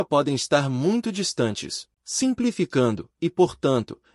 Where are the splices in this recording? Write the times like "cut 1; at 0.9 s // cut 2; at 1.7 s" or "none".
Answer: cut 1; at 1.9 s // cut 2; at 3.2 s